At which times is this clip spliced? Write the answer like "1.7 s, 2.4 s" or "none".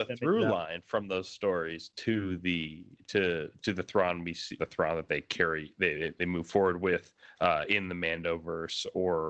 4.6 s